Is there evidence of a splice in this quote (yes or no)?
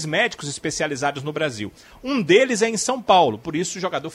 no